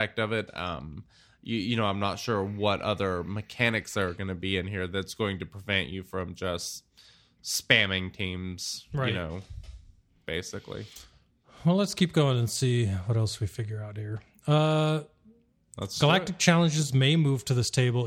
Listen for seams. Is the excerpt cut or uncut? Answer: uncut